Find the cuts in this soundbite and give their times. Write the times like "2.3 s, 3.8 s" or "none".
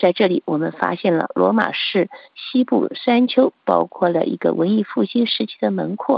none